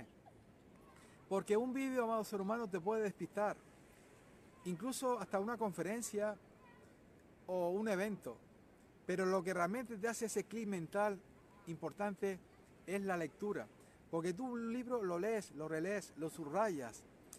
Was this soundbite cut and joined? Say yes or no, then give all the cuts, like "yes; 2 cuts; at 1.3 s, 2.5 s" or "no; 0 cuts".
no; 0 cuts